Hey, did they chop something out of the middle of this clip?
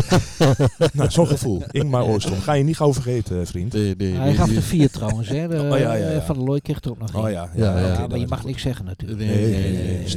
no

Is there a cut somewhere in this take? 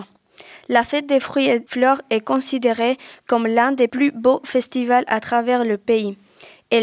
no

